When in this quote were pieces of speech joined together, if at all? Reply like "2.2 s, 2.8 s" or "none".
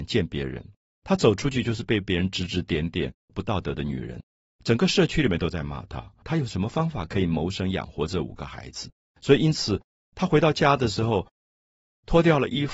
3.3 s, 6.2 s